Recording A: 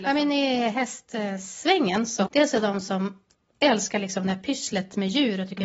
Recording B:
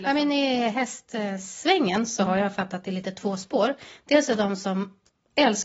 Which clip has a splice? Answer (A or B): A